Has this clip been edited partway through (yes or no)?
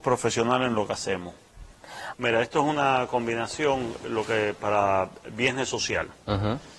yes